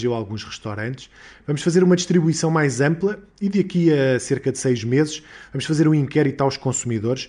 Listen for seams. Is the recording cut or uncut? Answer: uncut